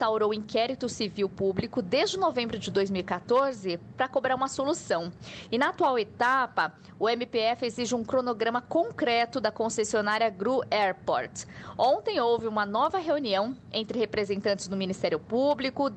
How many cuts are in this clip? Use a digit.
0